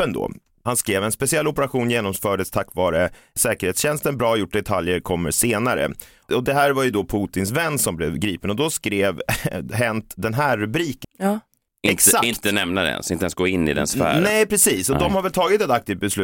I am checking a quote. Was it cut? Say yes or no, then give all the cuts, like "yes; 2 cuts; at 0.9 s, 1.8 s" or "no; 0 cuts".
yes; 1 cut; at 11.0 s